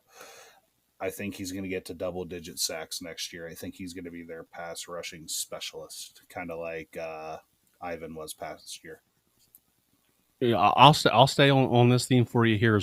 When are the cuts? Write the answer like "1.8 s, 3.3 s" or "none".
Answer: none